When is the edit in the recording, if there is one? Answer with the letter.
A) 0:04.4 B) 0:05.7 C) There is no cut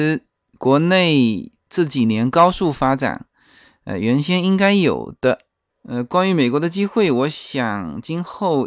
B